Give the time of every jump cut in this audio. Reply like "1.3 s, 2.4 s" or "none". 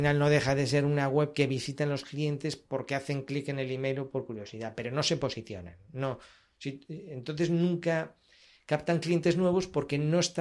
none